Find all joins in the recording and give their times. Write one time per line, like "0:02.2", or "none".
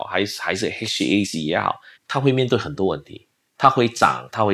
0:01.9